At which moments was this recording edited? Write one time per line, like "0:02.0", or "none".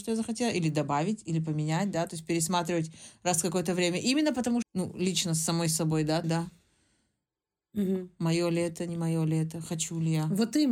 0:04.6
0:06.2